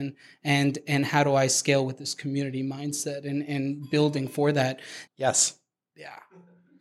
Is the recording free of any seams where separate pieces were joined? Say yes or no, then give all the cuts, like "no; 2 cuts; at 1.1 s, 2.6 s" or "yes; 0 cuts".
no; 1 cut; at 5.1 s